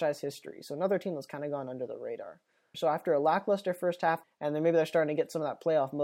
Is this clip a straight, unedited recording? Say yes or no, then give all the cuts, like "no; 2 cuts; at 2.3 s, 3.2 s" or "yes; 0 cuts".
no; 2 cuts; at 2.7 s, 4.2 s